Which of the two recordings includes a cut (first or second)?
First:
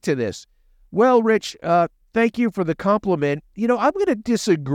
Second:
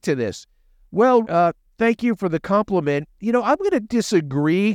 second